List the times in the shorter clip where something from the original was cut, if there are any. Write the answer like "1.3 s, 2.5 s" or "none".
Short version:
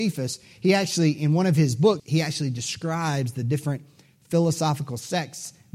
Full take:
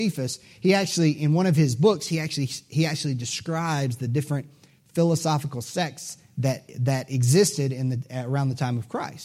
2.0 s